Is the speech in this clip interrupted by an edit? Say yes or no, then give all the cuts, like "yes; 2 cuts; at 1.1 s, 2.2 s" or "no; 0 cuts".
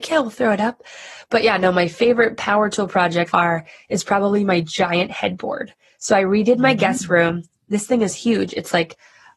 yes; 1 cut; at 3.3 s